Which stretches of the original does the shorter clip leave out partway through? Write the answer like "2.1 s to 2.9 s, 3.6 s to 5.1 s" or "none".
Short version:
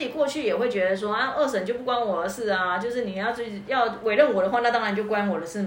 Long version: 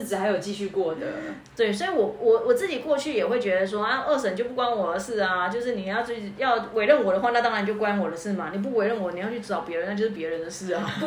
none